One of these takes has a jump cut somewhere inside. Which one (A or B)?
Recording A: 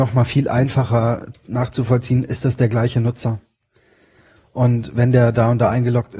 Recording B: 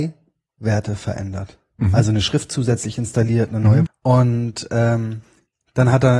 B